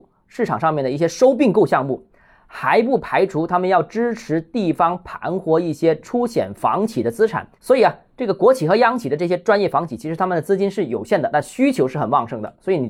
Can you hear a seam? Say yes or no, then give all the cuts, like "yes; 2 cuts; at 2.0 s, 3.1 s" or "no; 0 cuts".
no; 0 cuts